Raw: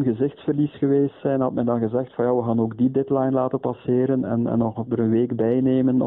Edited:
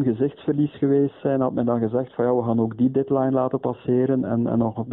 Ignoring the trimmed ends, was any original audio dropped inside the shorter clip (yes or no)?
no